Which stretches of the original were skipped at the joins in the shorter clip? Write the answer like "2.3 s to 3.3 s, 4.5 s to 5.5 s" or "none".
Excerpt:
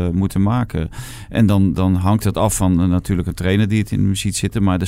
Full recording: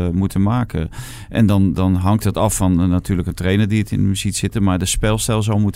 none